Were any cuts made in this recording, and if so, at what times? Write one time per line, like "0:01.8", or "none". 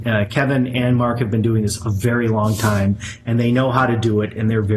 none